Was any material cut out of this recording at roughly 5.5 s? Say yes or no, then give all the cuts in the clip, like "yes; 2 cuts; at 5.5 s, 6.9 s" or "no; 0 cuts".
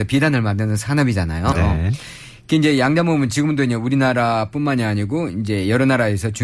no; 1 cut; at 1.5 s